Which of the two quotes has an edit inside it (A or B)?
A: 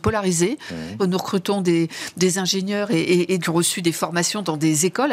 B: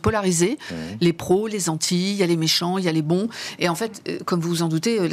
A